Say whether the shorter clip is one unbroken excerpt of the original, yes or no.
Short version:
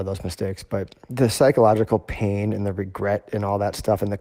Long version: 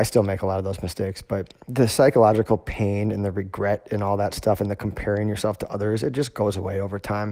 yes